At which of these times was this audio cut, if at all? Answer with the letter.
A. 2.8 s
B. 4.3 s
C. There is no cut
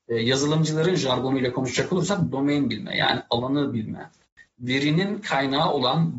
C